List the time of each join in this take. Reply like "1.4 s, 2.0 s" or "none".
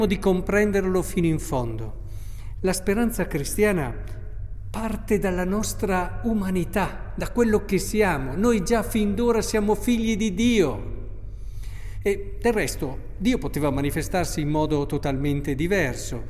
none

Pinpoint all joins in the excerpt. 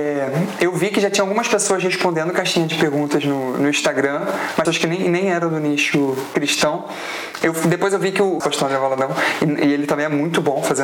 4.7 s, 8.4 s

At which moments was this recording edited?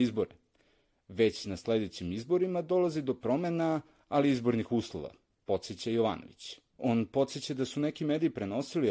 6.7 s

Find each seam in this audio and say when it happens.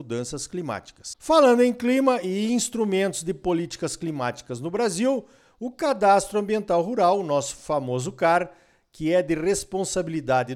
none

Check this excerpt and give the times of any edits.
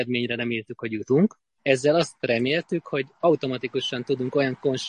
1.6 s

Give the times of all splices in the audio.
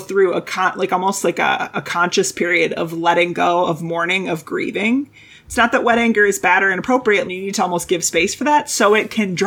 7.2 s

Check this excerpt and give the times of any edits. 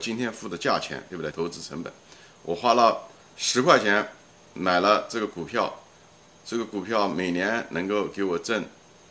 1.3 s

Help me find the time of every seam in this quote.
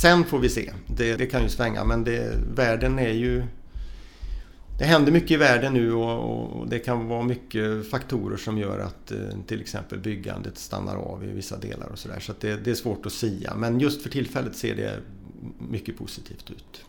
1.2 s

